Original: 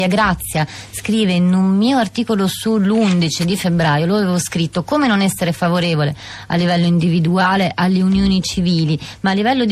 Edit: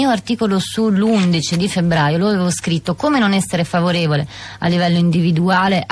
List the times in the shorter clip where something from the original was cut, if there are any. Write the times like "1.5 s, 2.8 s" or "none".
none